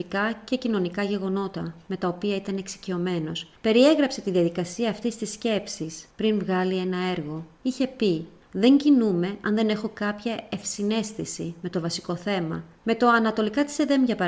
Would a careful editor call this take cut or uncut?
uncut